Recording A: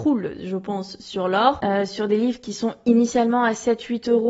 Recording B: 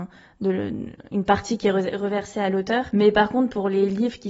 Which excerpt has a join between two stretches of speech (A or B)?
A